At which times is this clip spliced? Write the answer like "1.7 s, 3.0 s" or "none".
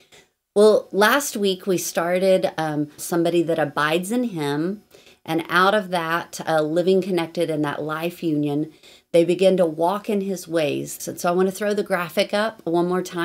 3.0 s, 11.0 s